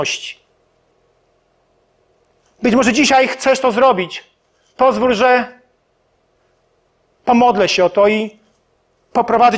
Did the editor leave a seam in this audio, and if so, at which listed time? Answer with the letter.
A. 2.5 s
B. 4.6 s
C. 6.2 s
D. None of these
A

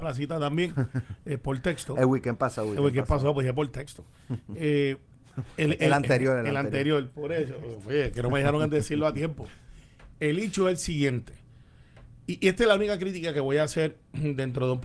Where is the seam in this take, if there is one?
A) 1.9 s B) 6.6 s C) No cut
C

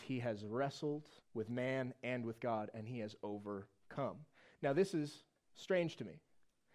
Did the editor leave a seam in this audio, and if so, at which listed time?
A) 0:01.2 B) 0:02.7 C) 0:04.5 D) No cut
A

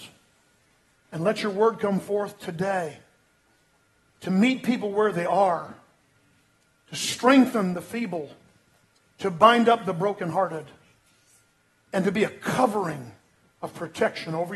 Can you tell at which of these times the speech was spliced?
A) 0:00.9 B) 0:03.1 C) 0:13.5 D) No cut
D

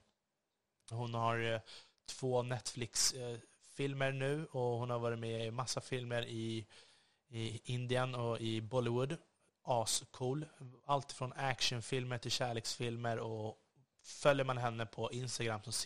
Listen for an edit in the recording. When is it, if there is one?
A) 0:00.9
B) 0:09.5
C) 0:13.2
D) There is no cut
A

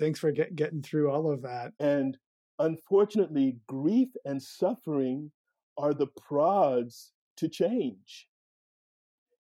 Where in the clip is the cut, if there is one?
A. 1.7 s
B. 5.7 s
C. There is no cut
A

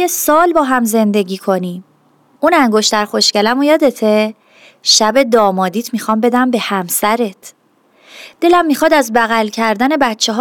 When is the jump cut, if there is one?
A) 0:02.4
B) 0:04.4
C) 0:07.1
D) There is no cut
A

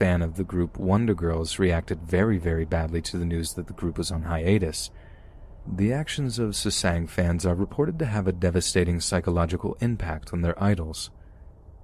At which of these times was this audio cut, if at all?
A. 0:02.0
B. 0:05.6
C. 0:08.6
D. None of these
B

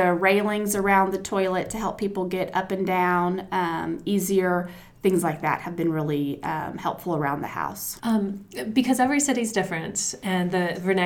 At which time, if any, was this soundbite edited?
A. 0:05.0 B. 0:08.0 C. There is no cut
B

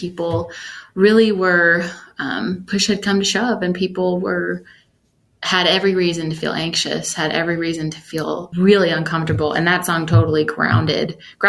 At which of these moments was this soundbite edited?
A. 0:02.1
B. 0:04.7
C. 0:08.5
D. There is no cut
C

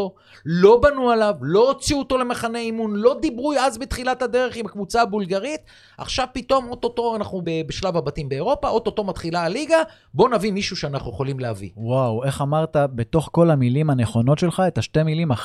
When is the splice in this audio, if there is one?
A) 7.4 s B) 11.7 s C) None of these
A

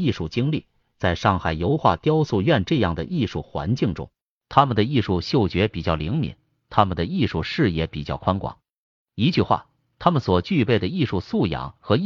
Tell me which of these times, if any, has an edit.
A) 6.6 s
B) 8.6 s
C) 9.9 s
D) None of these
A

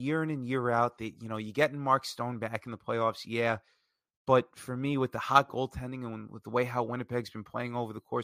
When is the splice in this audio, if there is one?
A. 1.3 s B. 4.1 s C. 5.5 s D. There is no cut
D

